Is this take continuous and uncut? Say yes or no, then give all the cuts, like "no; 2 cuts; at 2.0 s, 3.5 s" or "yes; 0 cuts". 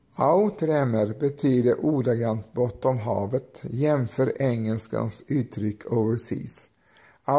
yes; 0 cuts